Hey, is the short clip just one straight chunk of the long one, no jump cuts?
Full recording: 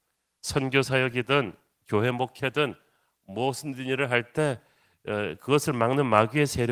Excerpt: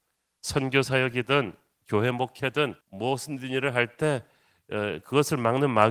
no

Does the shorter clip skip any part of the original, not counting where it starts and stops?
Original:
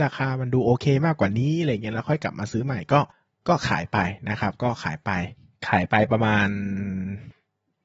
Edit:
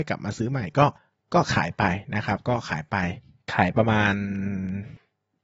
yes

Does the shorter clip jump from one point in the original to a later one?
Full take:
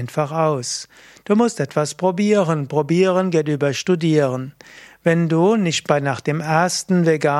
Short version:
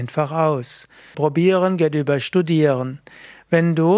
yes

